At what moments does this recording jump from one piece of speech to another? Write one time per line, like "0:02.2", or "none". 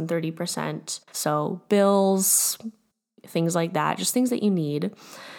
0:01.1